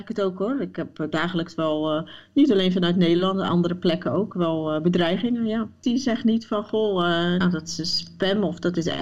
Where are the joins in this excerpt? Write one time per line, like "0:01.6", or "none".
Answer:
0:05.8
0:07.4